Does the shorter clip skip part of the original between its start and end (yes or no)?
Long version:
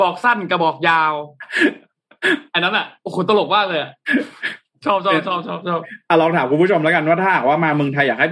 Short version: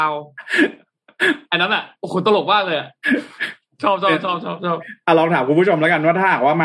no